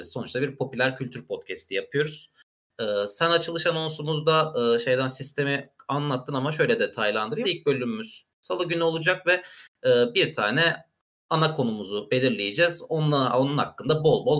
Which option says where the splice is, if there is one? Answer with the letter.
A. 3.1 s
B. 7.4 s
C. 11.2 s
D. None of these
B